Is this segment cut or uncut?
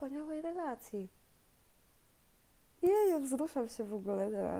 cut